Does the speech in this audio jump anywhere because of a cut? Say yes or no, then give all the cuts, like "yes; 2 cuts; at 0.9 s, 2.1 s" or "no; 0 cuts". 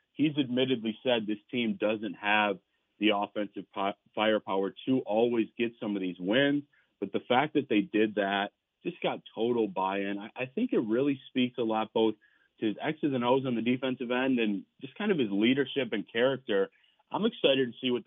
no; 0 cuts